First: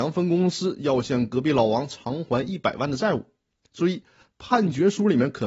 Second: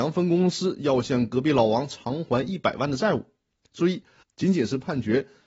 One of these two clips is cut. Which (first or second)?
second